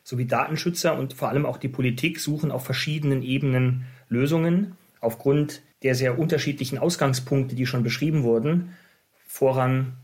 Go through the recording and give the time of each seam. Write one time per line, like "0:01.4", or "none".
0:05.7

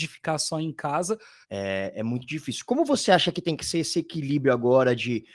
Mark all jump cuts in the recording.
0:01.4

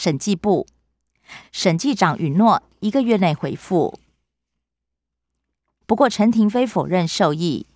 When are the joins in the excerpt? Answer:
0:01.4
0:05.8

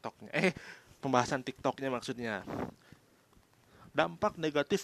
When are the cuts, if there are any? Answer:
0:01.0

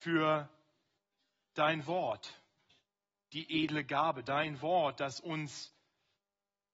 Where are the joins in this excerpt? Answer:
none

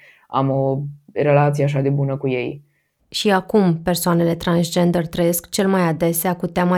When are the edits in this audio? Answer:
0:03.0

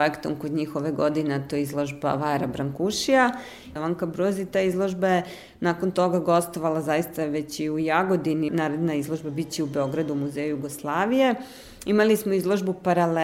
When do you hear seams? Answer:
0:03.8
0:08.5

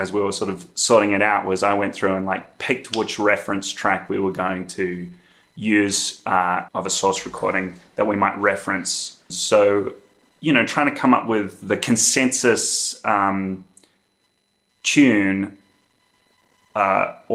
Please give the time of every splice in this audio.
0:06.7
0:09.3

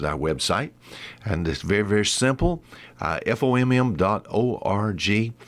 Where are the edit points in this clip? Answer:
none

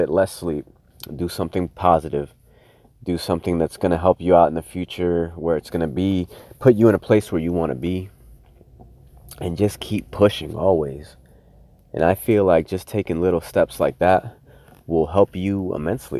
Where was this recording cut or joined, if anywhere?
none

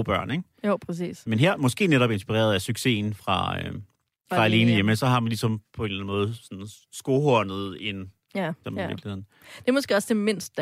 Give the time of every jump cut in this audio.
0:04.3
0:08.6

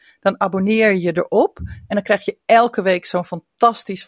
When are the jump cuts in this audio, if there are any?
none

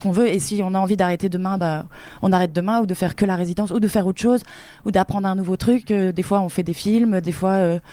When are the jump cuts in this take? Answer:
none

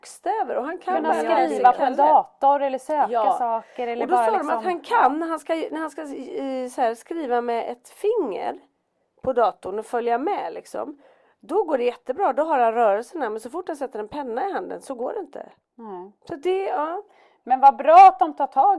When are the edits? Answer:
none

